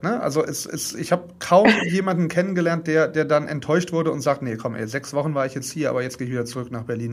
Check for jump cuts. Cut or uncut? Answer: uncut